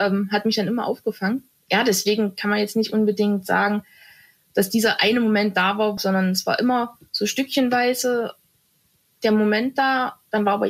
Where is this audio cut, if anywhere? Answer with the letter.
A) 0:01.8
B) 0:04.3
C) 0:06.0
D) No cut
C